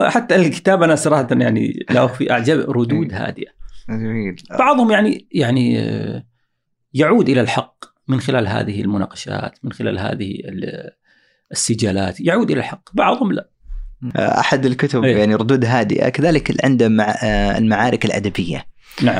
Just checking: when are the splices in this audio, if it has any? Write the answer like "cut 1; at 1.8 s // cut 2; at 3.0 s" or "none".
none